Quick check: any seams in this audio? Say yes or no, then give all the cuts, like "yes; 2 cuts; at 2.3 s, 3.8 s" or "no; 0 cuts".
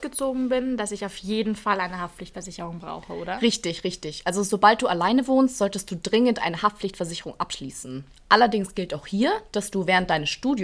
no; 0 cuts